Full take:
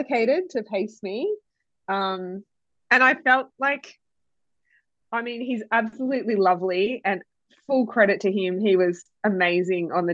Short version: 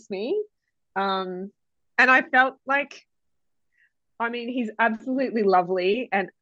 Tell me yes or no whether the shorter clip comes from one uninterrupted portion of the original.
yes